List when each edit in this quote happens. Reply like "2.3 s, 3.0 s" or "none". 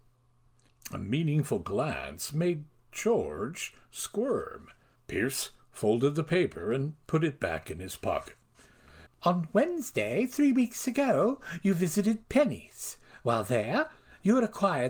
5.0 s, 9.1 s